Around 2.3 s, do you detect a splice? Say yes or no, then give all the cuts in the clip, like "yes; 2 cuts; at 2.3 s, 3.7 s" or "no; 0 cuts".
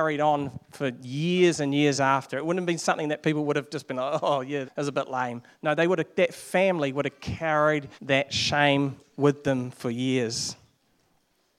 no; 2 cuts; at 4.6 s, 7.9 s